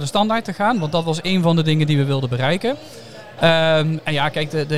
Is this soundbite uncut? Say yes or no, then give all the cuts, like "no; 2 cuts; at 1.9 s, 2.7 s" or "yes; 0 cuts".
no; 1 cut; at 3.4 s